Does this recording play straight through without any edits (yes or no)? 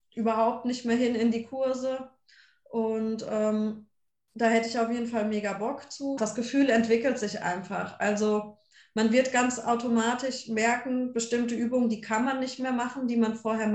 no